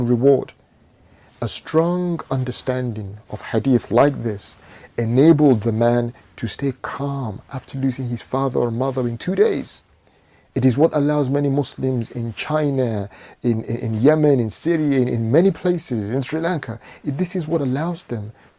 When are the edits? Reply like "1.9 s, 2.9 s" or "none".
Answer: none